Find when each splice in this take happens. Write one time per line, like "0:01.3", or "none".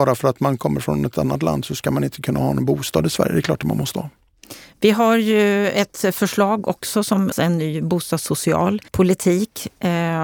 0:07.3
0:08.9

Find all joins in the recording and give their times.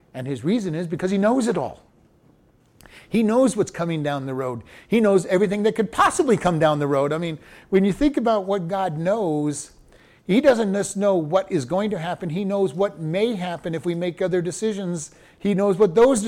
none

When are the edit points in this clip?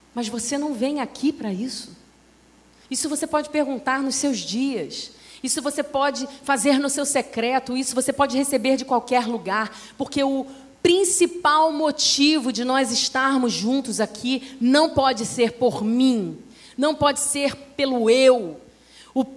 none

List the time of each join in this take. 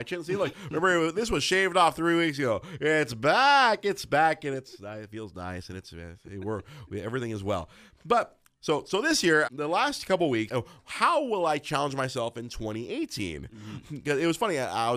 0:09.5
0:10.5

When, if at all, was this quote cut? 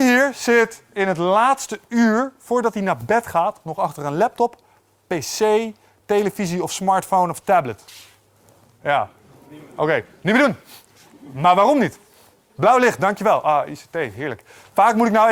0:12.6

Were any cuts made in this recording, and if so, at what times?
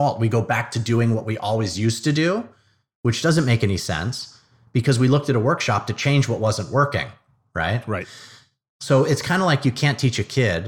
none

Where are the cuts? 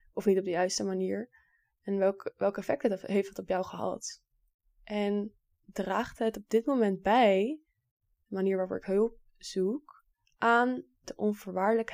none

